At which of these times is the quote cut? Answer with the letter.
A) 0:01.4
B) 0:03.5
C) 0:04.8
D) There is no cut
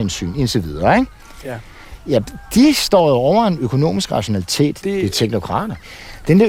C